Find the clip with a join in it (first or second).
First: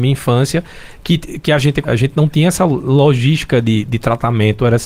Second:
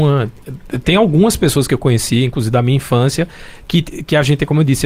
first